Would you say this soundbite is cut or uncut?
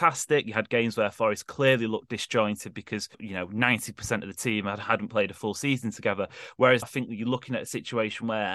cut